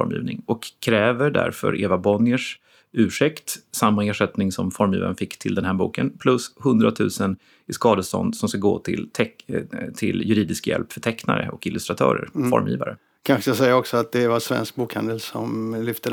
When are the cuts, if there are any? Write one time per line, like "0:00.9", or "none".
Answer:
none